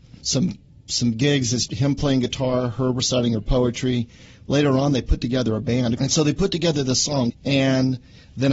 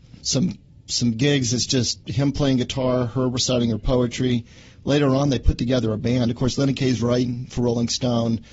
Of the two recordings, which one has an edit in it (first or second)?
first